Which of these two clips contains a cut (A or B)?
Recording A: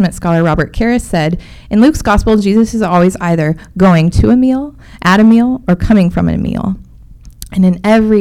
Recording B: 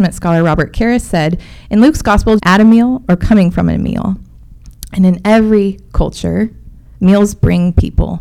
B